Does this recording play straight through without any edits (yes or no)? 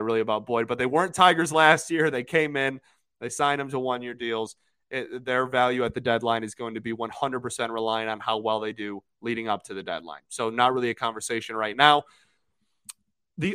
yes